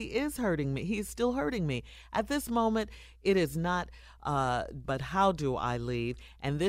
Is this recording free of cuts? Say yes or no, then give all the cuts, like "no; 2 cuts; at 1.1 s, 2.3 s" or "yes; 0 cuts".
no; 1 cut; at 4.8 s